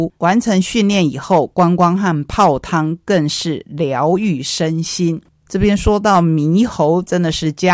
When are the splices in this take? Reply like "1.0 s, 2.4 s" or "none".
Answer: none